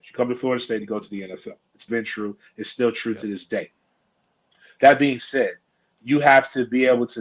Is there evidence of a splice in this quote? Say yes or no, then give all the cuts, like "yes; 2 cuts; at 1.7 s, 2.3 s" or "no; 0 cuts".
yes; 1 cut; at 1.9 s